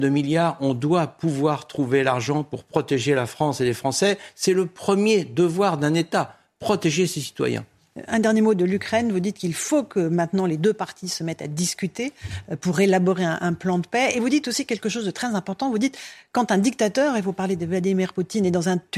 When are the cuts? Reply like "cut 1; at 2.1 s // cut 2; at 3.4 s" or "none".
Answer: none